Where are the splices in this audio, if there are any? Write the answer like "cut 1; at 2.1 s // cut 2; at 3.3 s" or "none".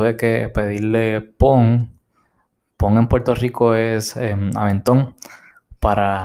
none